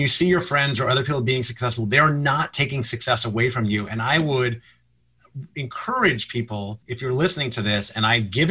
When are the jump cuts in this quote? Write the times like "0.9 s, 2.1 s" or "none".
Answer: 6.8 s